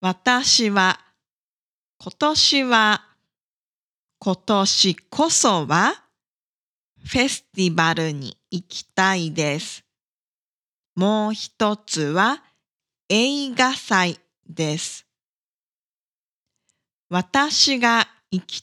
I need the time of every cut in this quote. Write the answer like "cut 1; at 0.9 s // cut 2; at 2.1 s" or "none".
cut 1; at 10.8 s